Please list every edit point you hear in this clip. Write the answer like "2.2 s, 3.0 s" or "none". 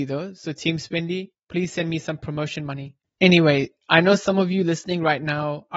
1.3 s, 3.0 s